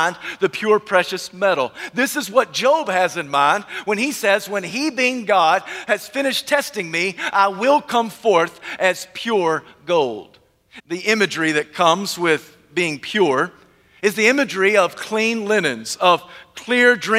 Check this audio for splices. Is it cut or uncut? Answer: cut